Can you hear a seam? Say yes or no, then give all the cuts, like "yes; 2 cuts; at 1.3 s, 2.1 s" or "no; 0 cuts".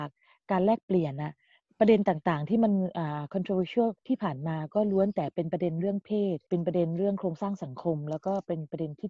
yes; 2 cuts; at 4.0 s, 6.4 s